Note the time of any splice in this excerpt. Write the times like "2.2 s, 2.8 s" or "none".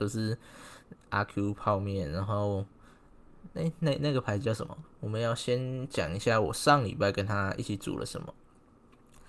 4.8 s